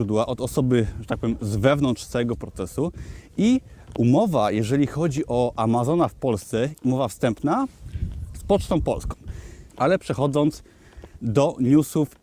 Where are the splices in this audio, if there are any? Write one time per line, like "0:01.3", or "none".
0:06.7
0:09.7